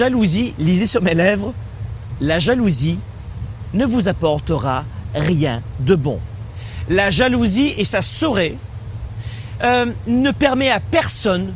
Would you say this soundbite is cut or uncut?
uncut